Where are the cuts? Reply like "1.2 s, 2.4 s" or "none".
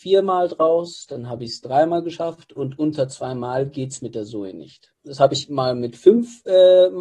2.6 s, 4.9 s

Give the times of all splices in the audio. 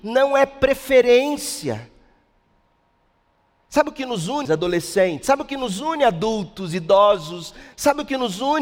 4.5 s

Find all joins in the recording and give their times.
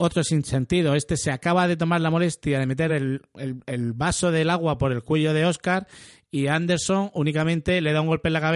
none

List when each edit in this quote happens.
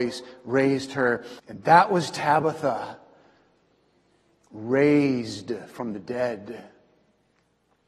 1.4 s

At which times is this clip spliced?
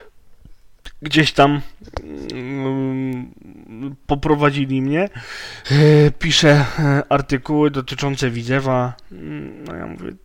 5.6 s

